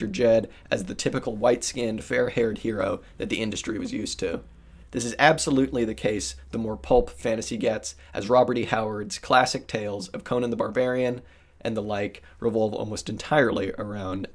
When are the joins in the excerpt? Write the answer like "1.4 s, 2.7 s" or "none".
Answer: 4.8 s